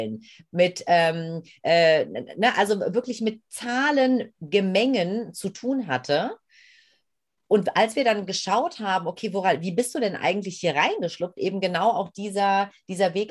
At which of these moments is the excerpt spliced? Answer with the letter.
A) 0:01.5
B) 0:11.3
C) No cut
C